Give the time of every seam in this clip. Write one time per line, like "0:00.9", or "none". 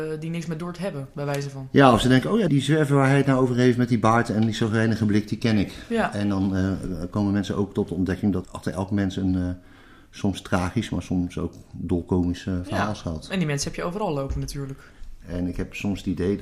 0:02.5
0:08.4
0:15.2